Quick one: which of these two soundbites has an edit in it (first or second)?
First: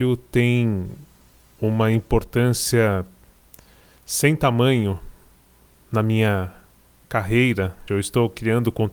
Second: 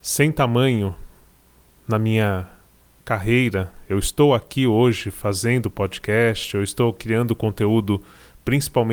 first